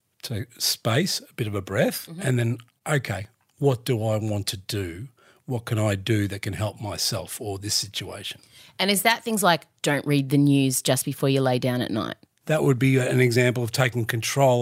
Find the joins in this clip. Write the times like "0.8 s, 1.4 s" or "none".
none